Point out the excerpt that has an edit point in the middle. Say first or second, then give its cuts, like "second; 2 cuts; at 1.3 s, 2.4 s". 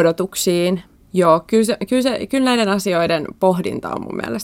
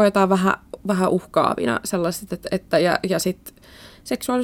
first; 1 cut; at 1.0 s